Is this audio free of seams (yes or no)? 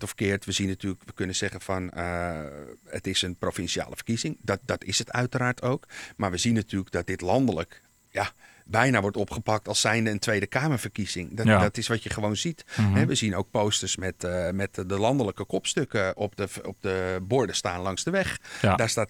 yes